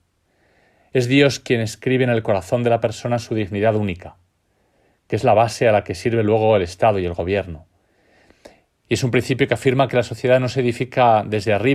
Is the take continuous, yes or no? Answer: no